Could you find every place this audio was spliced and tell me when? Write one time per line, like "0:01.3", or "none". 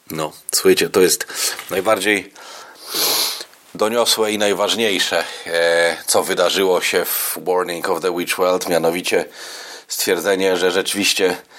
none